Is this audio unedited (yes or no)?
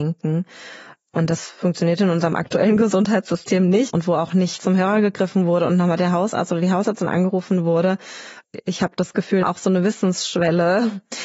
no